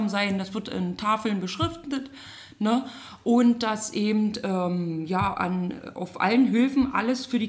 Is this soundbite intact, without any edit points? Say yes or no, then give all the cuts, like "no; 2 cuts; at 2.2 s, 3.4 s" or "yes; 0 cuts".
yes; 0 cuts